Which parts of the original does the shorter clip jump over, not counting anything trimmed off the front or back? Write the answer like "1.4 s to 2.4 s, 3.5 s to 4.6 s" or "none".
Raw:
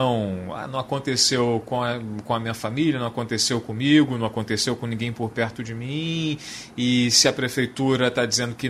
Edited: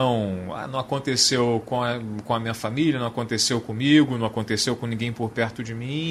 none